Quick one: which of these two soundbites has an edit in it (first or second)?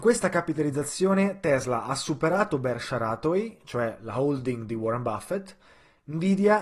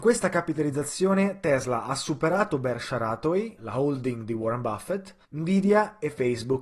second